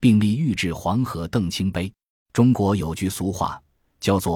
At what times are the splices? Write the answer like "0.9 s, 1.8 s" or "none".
2.1 s